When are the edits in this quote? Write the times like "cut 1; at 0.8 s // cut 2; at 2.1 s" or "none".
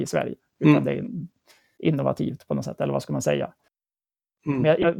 none